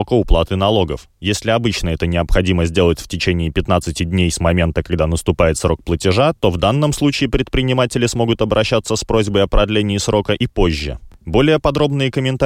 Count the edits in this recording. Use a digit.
0